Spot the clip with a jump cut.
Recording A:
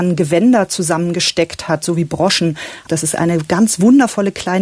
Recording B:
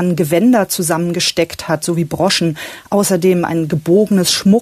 A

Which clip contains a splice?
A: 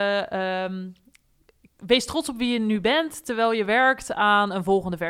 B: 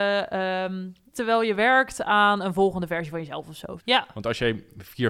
B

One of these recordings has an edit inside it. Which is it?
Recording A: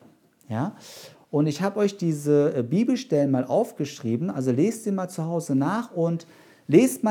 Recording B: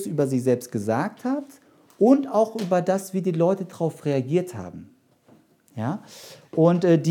A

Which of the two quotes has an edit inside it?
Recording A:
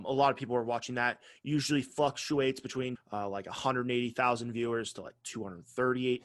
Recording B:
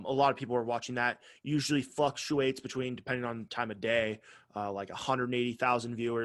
A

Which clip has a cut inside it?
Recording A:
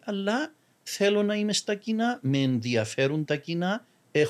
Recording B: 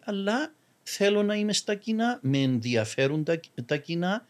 A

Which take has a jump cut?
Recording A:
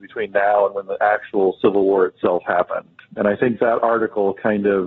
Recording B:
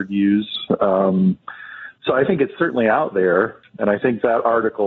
B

